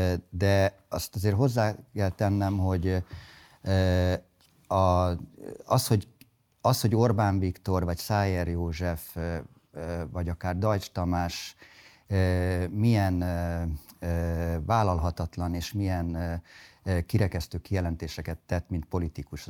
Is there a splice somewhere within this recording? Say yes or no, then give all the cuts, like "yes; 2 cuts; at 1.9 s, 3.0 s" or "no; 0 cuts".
no; 0 cuts